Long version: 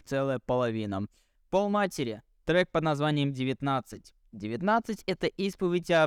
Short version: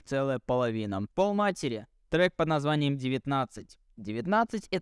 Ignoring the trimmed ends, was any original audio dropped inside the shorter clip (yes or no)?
yes